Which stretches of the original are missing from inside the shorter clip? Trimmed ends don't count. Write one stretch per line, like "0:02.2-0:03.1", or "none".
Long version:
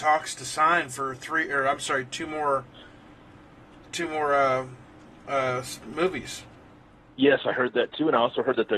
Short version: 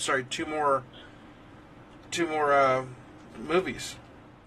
0:05.1-0:05.8